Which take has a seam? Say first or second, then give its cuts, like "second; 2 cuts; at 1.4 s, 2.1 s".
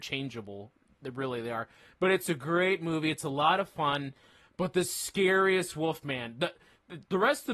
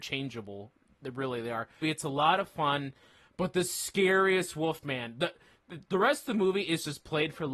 second; 1 cut; at 1.8 s